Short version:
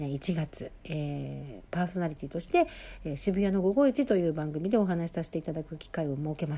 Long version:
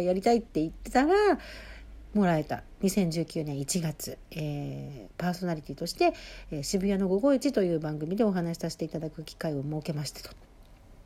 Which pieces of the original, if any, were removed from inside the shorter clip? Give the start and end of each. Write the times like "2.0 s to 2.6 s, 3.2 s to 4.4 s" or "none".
none

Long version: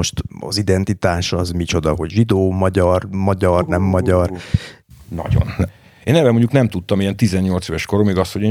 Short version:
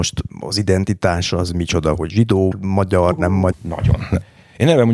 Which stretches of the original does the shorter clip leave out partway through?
2.5 s to 3.0 s, 4.0 s to 5.0 s

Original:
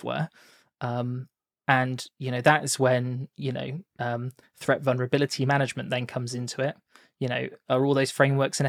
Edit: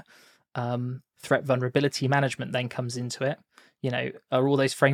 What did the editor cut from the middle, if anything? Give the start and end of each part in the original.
1.4 s to 4.5 s

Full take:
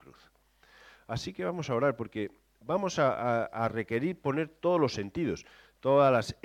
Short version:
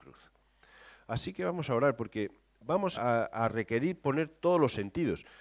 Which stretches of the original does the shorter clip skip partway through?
2.9 s to 3.1 s

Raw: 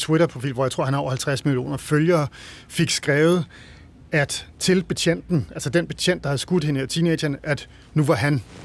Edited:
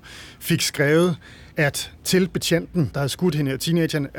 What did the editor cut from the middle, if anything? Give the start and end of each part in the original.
3.8 s to 4.1 s, 5.5 s to 6.2 s

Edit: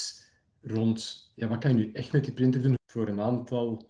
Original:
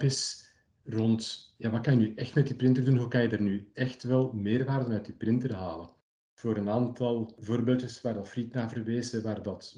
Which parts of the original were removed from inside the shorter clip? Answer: 3.0 s to 6.2 s

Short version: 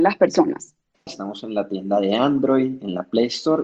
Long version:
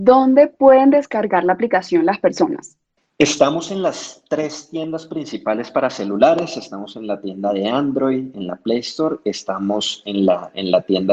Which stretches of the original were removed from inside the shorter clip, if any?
3.1 s to 6.6 s

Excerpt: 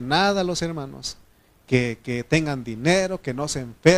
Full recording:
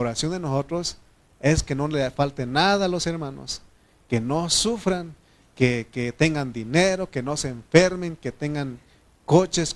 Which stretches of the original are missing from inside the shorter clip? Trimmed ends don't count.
4.0 s to 5.5 s

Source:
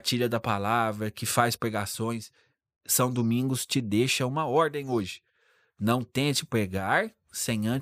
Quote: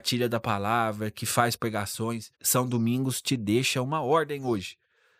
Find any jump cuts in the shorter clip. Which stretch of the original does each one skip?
2.3 s to 2.8 s

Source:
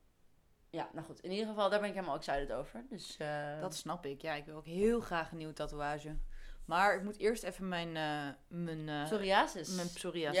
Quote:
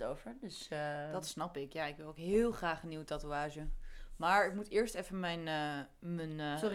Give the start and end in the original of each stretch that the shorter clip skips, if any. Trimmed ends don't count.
none

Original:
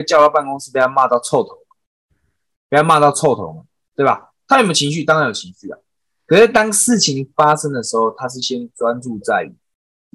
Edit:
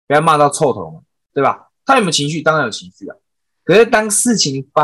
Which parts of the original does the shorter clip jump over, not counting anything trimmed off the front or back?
none

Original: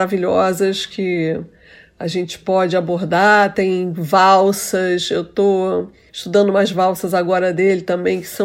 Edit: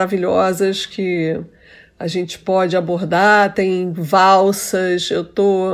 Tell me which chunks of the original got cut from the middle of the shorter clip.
none

